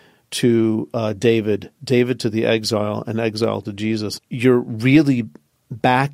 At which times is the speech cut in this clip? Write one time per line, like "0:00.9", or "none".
0:04.2